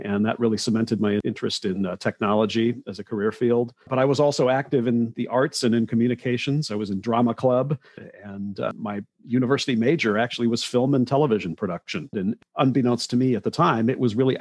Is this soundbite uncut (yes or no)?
no